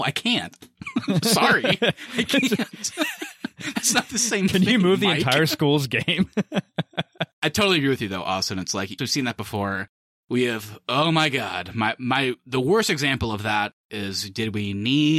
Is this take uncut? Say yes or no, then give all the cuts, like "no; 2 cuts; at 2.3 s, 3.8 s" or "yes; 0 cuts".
no; 1 cut; at 9.0 s